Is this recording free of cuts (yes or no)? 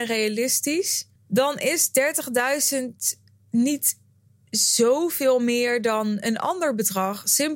no